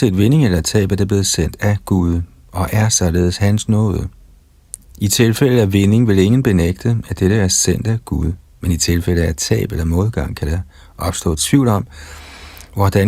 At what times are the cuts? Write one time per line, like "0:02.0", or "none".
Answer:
none